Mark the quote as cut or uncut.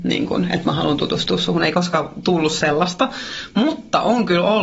uncut